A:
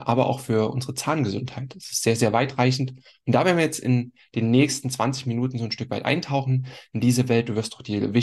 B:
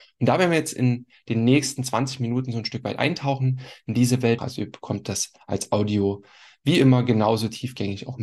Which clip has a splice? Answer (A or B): B